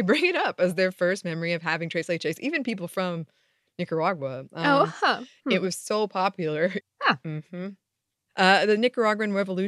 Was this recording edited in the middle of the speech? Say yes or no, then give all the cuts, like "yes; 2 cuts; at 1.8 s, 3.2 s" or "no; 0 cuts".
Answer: yes; 1 cut; at 6.8 s